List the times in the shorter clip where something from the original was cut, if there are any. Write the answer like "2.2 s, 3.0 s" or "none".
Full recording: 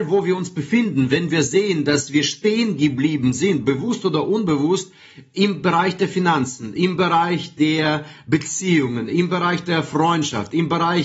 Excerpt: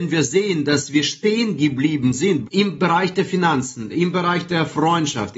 2.4 s, 3.9 s